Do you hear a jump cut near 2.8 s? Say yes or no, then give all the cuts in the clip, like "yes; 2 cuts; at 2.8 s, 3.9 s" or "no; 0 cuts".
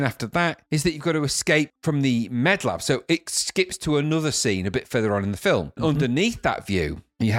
no; 1 cut; at 5.8 s